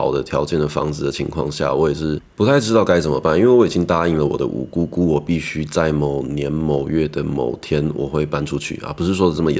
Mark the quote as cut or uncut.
uncut